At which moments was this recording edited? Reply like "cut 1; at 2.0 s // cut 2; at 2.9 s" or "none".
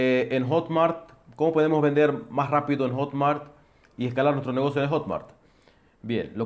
none

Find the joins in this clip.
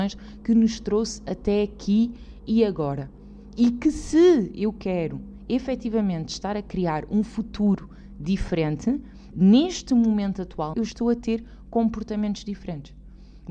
cut 1; at 9.3 s // cut 2; at 10.7 s

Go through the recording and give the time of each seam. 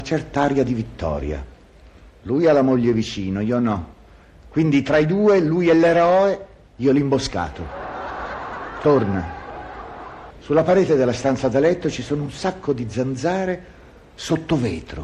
cut 1; at 10.3 s

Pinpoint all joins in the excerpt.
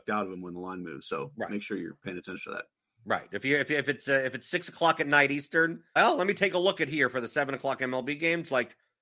cut 1; at 6.0 s

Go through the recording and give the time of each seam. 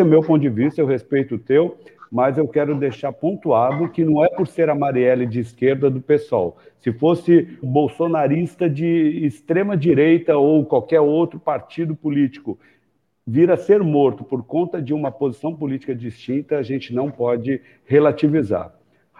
cut 1; at 7.6 s

